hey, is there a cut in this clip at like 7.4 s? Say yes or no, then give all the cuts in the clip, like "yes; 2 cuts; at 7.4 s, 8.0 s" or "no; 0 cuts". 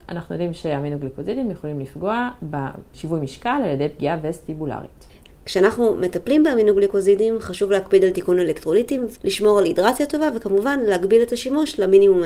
no; 2 cuts; at 5.3 s, 9.1 s